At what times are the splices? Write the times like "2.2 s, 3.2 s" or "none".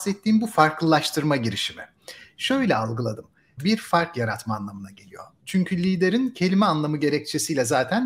3.6 s, 5.4 s